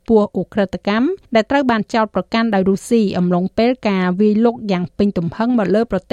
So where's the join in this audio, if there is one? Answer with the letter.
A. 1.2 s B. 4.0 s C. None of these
A